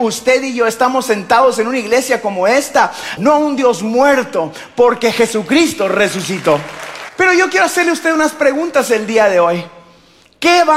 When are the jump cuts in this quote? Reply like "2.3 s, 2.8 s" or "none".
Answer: 3.2 s, 7.1 s